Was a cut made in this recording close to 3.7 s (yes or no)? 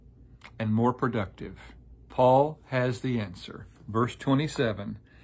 yes